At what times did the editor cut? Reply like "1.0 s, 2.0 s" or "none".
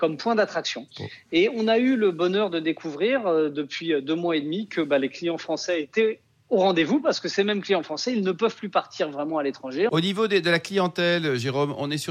9.9 s